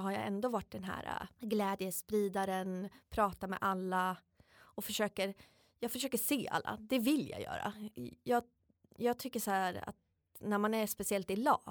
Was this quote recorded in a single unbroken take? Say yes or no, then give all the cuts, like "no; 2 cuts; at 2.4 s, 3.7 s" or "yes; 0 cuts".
yes; 0 cuts